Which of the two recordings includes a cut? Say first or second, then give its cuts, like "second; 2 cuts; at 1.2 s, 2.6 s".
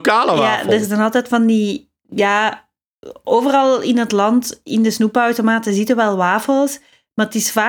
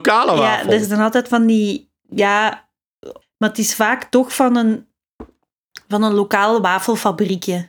second; 1 cut; at 3.2 s